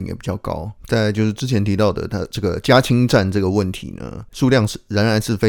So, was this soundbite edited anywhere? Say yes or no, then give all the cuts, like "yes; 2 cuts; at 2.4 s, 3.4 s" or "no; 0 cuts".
no; 0 cuts